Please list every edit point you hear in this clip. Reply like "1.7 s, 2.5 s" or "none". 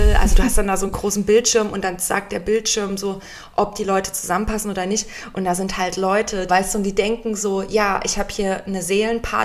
6.5 s